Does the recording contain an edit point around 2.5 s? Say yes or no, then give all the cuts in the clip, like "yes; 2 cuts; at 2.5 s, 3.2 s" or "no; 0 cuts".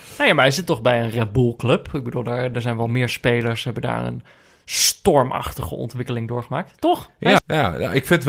yes; 2 cuts; at 2.5 s, 7.4 s